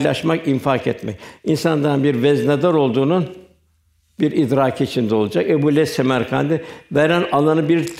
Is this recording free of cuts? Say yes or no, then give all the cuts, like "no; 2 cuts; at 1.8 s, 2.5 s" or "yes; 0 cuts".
yes; 0 cuts